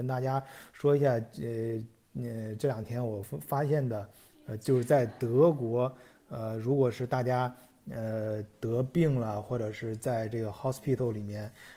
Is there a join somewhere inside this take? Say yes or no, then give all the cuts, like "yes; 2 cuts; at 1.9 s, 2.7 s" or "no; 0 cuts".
no; 0 cuts